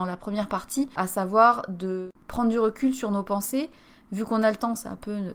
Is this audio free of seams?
yes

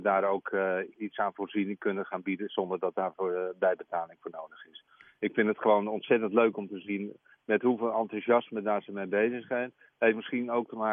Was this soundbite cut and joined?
yes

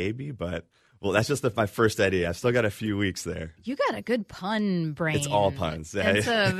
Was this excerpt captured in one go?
yes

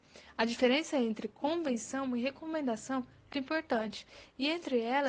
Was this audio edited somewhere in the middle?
yes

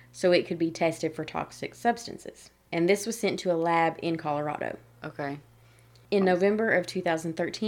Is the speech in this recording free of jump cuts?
yes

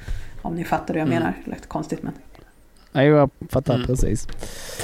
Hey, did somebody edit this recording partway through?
no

